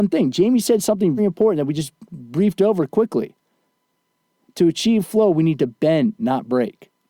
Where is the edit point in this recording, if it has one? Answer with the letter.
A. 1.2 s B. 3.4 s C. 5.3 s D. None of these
A